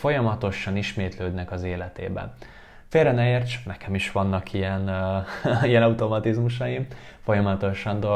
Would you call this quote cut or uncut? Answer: uncut